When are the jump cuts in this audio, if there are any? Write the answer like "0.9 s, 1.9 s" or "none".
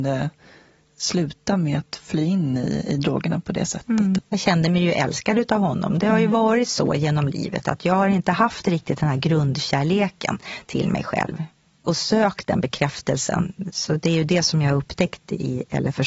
4.2 s